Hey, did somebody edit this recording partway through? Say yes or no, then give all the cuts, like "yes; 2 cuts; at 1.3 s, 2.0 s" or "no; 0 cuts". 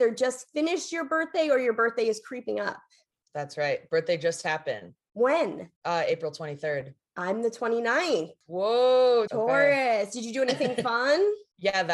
yes; 2 cuts; at 5.8 s, 9.3 s